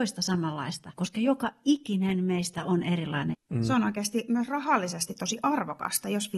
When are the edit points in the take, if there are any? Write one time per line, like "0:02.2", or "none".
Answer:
0:00.9
0:03.3